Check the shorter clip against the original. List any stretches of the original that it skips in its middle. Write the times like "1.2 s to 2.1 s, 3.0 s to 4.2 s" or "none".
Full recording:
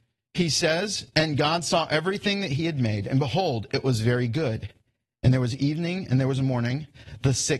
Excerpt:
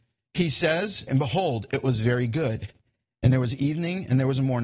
1.1 s to 3.1 s

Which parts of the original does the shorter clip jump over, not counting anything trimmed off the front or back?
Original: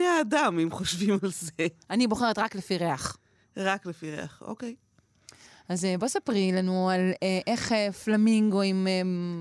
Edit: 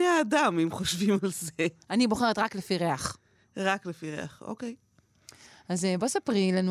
none

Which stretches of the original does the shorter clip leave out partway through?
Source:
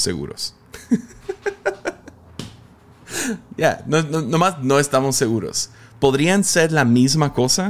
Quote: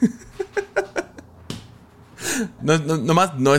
3.5 s to 3.8 s

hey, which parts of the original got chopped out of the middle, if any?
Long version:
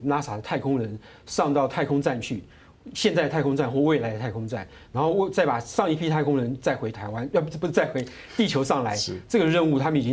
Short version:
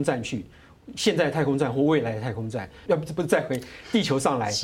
4.8 s to 7.3 s

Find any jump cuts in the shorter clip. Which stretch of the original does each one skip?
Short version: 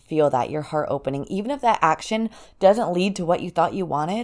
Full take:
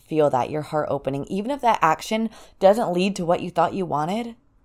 none

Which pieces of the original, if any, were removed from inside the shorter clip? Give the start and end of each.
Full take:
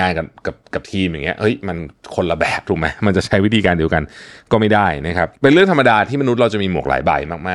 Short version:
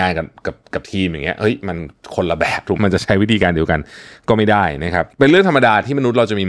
2.8 s to 3.0 s

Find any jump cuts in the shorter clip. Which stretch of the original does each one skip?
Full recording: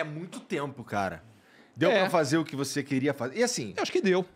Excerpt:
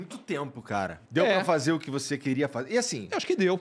1.3 s to 1.7 s

